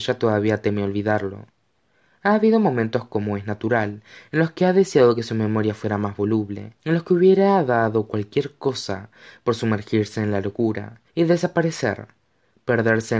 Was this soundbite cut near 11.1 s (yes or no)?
yes